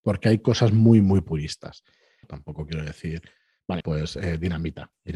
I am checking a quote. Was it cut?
yes; 2 cuts; at 2.2 s, 3.8 s

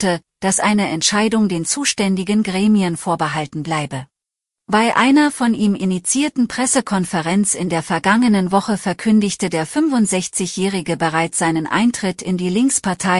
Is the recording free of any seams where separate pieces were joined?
no; 1 cut; at 4.5 s

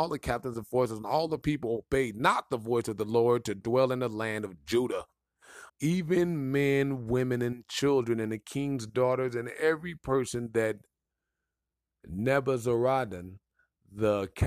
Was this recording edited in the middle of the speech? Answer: yes; 1 cut; at 5.7 s

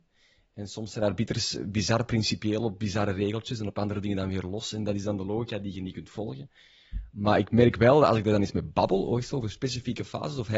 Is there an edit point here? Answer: no; 0 cuts

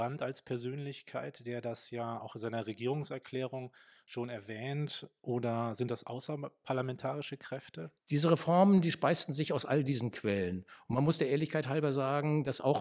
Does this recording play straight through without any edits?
no; 1 cut; at 8.0 s

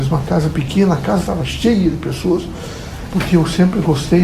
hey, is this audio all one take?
no; 1 cut; at 3.1 s

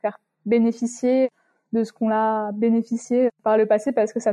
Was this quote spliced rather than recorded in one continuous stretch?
no; 0 cuts

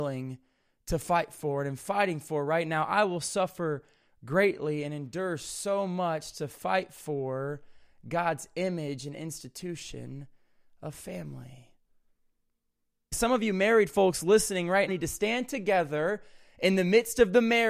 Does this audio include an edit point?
yes; 2 cuts; at 13.1 s, 14.9 s

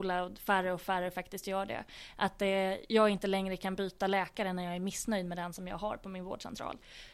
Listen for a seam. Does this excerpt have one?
no; 0 cuts

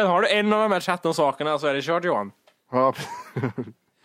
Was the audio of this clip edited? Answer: no; 0 cuts

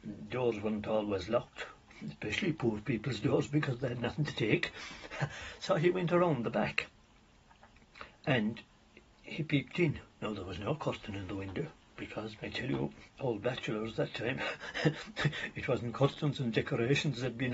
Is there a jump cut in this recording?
yes; 2 cuts; at 10.1 s, 12.4 s

